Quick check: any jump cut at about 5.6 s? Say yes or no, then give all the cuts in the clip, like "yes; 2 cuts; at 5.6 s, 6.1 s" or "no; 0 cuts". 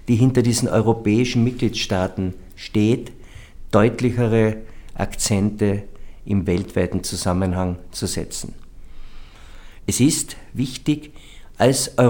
no; 1 cut; at 9.8 s